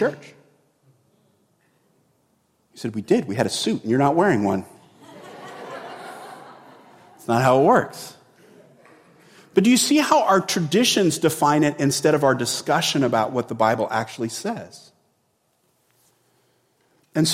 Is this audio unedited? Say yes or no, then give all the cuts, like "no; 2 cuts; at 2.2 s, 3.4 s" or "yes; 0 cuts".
yes; 0 cuts